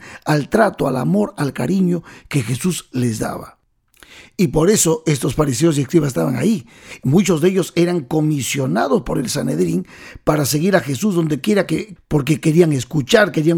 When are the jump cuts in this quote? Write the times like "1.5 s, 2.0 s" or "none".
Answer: 12.0 s